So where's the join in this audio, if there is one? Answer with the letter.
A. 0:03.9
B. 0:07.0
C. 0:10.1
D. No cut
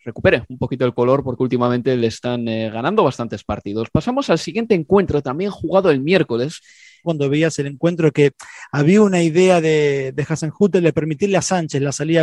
B